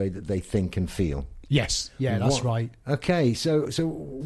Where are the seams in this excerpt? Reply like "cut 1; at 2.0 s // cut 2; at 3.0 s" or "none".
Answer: none